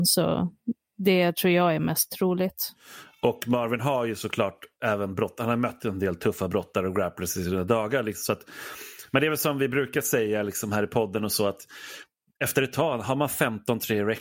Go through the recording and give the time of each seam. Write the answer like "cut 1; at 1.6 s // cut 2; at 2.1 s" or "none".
none